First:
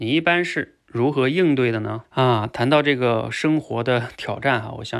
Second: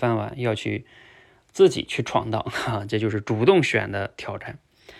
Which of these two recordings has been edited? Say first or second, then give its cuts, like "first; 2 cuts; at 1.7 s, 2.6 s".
first; 1 cut; at 2.0 s